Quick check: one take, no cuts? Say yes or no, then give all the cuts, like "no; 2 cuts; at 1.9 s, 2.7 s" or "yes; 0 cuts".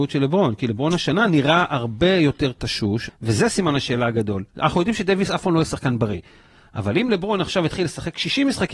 no; 1 cut; at 3.1 s